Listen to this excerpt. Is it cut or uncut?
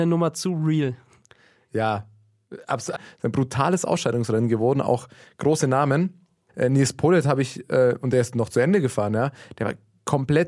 cut